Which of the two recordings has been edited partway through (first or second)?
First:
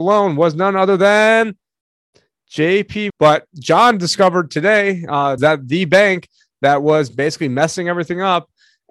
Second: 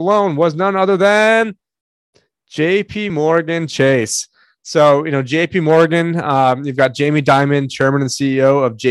first